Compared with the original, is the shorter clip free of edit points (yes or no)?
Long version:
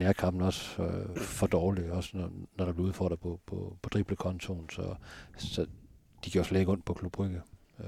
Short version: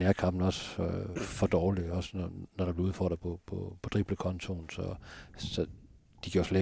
yes